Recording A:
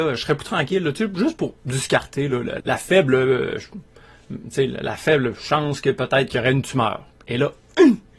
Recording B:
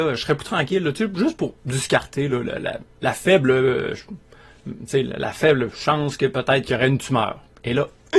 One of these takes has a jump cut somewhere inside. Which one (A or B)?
A